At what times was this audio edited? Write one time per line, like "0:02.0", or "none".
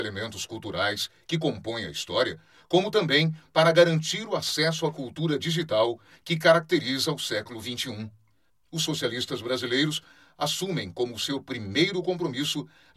0:08.5

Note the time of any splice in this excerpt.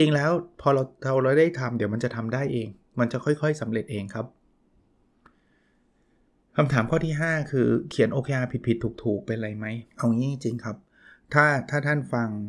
0:09.9

